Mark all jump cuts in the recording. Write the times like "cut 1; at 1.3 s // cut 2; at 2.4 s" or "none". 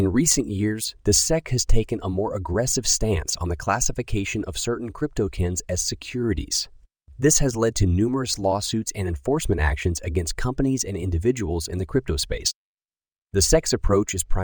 none